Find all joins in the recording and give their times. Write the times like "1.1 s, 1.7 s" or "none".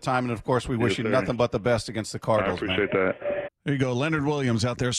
3.5 s